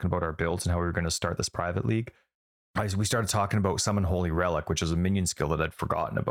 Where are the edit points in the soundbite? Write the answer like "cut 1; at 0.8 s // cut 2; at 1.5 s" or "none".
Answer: none